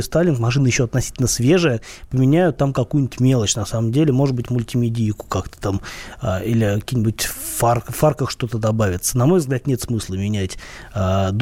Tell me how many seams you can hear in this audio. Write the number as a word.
zero